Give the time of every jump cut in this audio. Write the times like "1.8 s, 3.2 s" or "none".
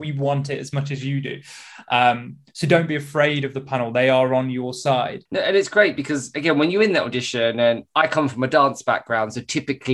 none